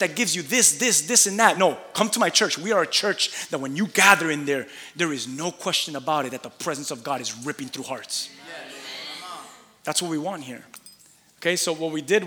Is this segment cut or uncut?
uncut